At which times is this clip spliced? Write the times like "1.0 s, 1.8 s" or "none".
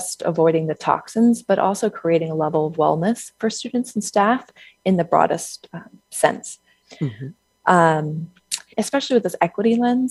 6.8 s, 8.7 s